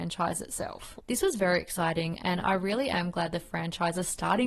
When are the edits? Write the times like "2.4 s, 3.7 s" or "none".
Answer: 1.0 s